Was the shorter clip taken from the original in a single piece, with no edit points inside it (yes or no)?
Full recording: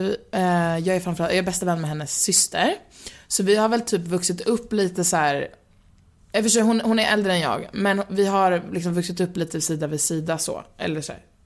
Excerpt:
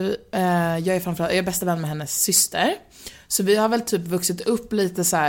yes